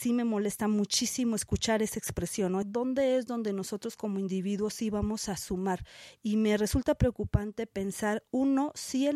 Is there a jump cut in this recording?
yes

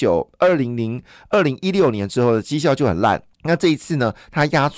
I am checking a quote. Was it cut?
yes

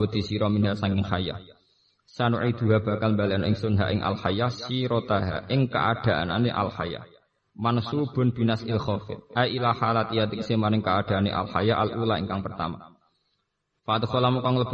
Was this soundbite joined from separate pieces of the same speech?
no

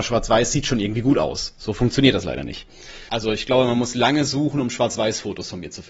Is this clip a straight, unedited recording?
no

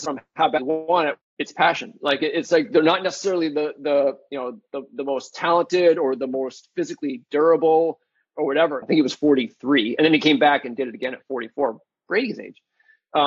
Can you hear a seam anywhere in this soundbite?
yes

